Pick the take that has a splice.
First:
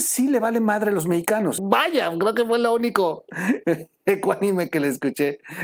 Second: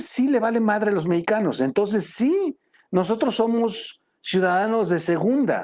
first; 1 cut; at 1.6 s

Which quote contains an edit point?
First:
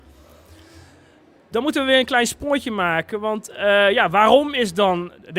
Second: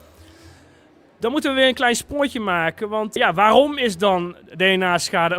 second; 1 cut; at 3.2 s

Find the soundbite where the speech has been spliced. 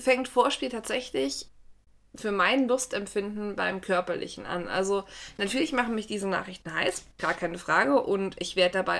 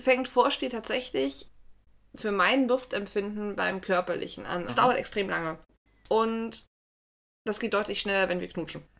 second; 1 cut; at 4.7 s

